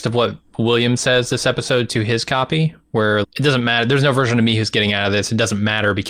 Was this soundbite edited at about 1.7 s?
no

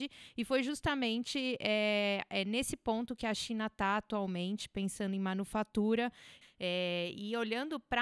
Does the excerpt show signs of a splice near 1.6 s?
no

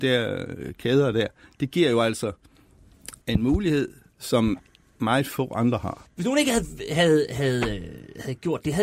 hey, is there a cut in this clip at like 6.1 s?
yes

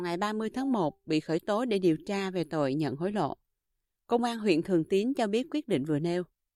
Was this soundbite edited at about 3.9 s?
no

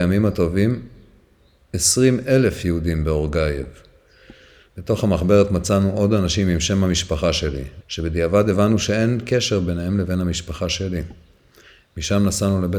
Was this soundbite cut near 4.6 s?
no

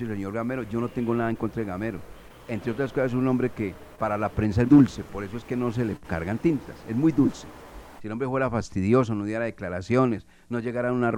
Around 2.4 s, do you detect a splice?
no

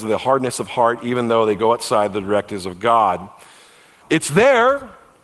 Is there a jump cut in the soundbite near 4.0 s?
yes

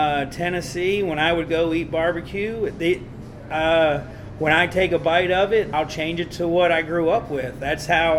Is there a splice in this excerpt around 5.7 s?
yes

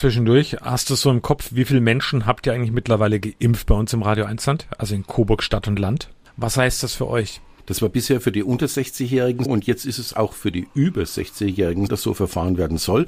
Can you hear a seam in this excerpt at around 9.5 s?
yes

